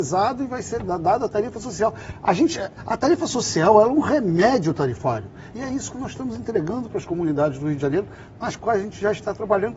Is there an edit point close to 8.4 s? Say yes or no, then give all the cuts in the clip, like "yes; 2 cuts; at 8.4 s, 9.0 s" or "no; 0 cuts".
no; 1 cut; at 5.5 s